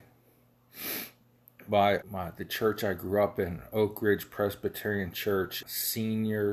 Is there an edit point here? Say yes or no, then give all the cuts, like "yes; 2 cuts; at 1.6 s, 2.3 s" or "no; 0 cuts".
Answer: yes; 2 cuts; at 2.0 s, 5.6 s